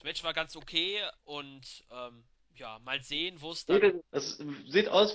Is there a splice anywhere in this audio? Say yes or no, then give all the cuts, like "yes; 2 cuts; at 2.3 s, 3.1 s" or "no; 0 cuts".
yes; 2 cuts; at 1.2 s, 4.0 s